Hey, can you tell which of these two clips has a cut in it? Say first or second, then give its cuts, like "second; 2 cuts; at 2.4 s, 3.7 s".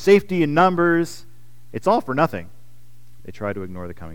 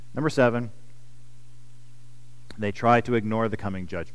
first; 1 cut; at 3.2 s